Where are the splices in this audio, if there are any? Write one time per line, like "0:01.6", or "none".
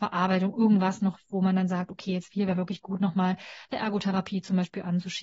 none